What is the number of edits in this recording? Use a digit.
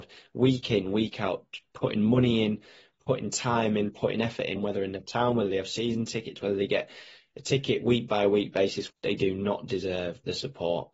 2